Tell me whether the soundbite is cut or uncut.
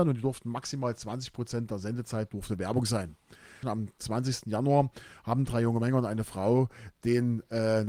cut